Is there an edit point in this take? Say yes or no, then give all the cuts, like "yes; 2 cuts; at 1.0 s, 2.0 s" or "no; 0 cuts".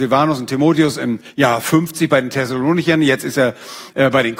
no; 0 cuts